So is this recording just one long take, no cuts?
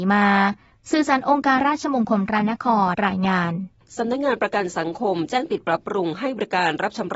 no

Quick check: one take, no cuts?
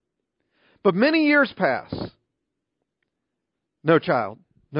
yes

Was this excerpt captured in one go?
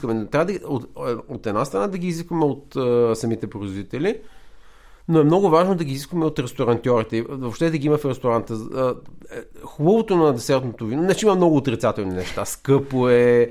yes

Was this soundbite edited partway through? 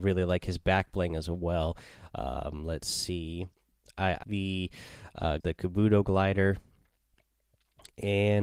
yes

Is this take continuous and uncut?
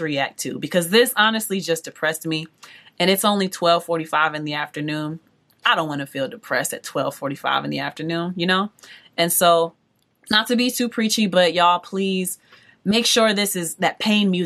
yes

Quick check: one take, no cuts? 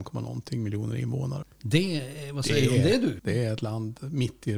no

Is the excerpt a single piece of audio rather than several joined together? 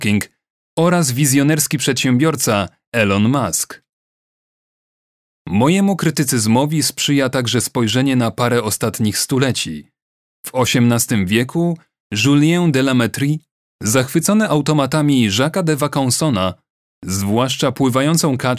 yes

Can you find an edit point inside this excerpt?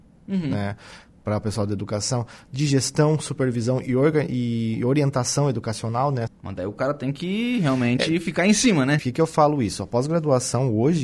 yes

